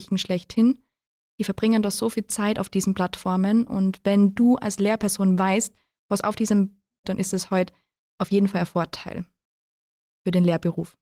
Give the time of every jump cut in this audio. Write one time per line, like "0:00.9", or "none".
0:07.0